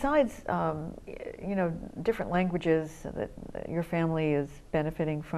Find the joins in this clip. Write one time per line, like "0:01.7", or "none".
none